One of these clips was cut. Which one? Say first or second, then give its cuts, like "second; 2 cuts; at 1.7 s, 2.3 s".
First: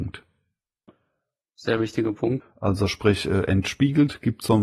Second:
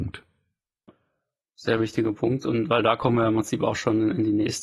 first; 1 cut; at 2.4 s